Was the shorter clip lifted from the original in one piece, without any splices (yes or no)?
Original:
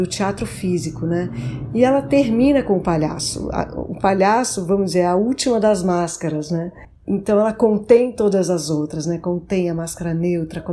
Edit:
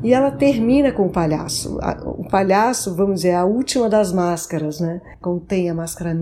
no